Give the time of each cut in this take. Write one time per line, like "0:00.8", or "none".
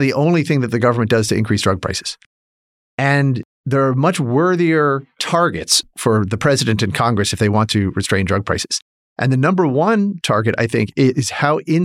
none